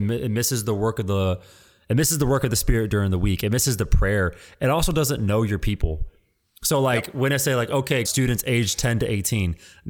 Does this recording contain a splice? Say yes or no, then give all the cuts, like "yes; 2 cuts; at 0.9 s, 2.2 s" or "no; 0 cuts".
yes; 1 cut; at 8.1 s